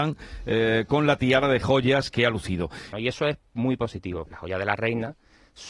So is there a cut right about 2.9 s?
yes; 2 cuts; at 2.9 s, 4.3 s

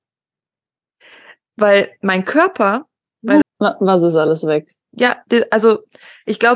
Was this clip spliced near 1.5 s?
no; 2 cuts; at 3.4 s, 4.8 s

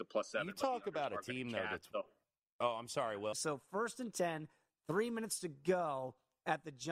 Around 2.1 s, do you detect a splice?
no; 1 cut; at 3.3 s

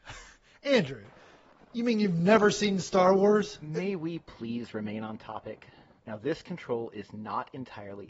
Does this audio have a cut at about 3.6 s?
no; 1 cut; at 6.0 s

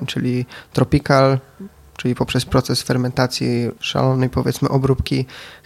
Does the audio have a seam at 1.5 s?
no; 1 cut; at 3.8 s

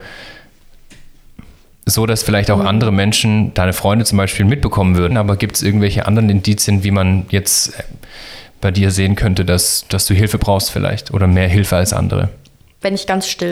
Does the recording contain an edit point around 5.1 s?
yes; 1 cut; at 5.1 s

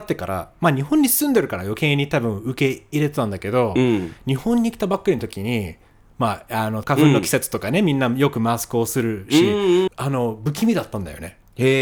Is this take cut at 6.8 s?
yes; 2 cuts; at 6.8 s, 9.9 s

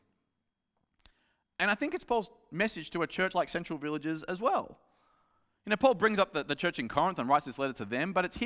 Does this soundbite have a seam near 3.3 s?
no; 0 cuts

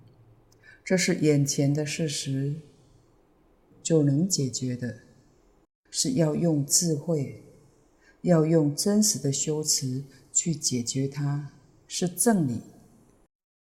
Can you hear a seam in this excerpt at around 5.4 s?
no; 2 cuts; at 3.7 s, 11.9 s

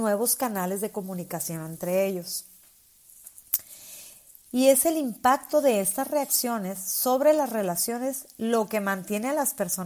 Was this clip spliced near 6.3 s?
no; 1 cut; at 4.5 s

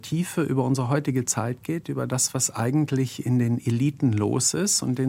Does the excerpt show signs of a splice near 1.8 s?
no; 0 cuts

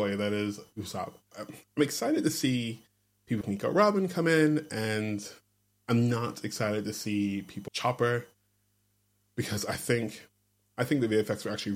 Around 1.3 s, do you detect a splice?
yes; 3 cuts; at 1.3 s, 3.4 s, 7.7 s

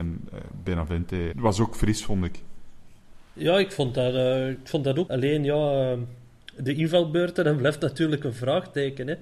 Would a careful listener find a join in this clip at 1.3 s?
yes; 2 cuts; at 1.3 s, 5.1 s

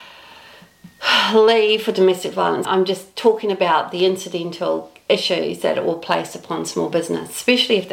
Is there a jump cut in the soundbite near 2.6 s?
yes; 1 cut; at 2.6 s

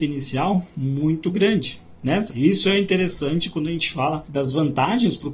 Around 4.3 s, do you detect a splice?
no; 1 cut; at 2.3 s

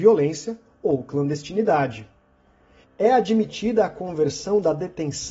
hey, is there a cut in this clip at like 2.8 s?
yes; 1 cut; at 2.8 s

